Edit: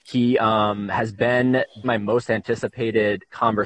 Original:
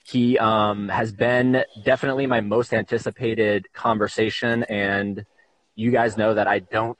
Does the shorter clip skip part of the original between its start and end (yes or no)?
yes